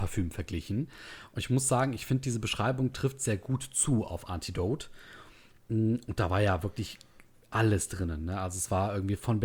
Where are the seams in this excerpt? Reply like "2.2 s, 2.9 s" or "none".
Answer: none